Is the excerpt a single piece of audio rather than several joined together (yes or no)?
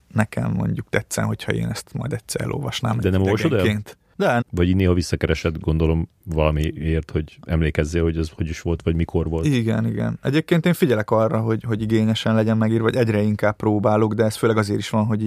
no